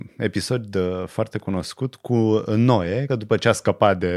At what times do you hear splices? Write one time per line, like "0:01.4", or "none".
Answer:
0:03.1